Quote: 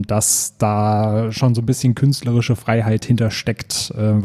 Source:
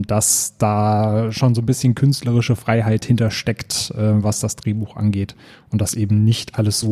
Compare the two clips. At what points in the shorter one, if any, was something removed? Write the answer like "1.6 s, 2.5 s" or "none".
none